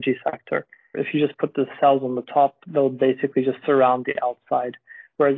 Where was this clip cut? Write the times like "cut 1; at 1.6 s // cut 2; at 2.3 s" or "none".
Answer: cut 1; at 0.9 s

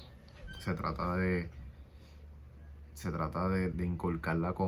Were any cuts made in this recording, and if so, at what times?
cut 1; at 3.7 s

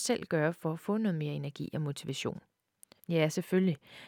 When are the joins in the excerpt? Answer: cut 1; at 3.0 s

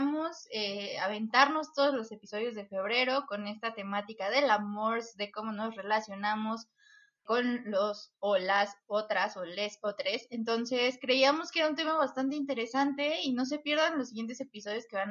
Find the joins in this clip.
none

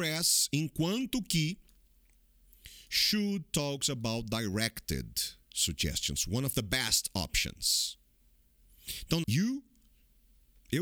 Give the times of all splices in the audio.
cut 1; at 9.2 s

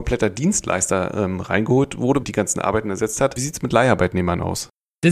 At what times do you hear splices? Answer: cut 1; at 2.2 s

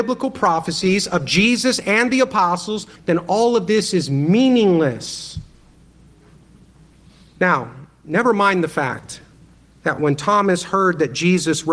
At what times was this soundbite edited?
cut 1; at 3.0 s

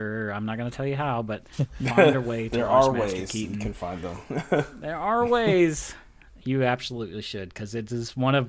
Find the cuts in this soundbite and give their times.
none

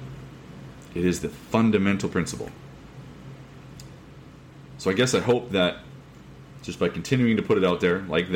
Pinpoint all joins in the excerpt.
none

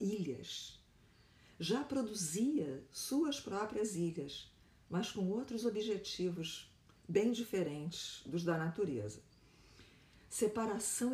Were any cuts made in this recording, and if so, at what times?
cut 1; at 10.1 s

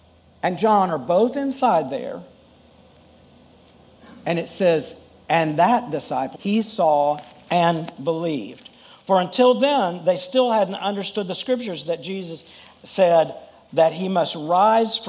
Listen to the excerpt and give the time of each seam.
cut 1; at 6.4 s

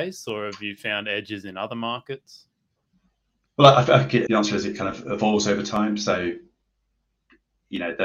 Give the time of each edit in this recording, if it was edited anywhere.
cut 1; at 4.3 s

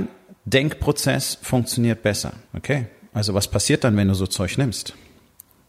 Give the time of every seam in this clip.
cut 1; at 2.4 s

